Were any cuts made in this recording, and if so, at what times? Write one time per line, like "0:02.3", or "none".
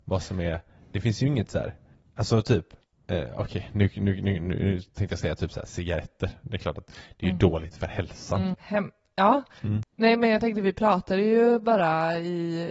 0:08.5
0:09.8